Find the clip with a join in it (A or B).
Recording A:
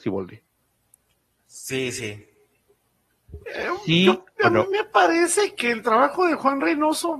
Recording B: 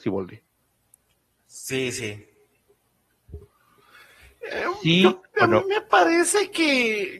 A